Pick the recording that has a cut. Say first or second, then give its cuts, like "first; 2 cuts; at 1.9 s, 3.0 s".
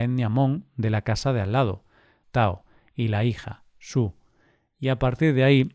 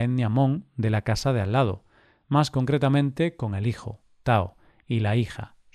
first; 1 cut; at 2.2 s